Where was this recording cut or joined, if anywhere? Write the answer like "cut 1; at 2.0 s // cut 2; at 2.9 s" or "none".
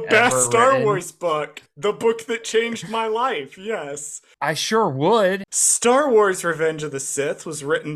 cut 1; at 4.3 s // cut 2; at 5.4 s